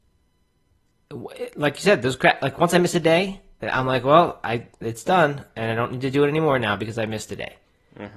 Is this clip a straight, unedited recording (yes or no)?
no